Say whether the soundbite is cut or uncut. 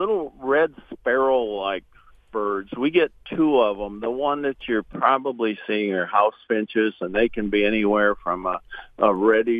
uncut